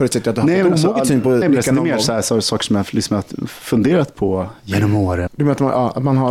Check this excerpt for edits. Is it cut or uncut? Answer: cut